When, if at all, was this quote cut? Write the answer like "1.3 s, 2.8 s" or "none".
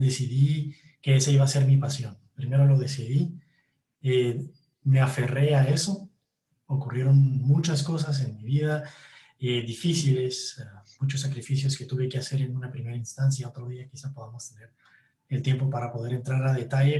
none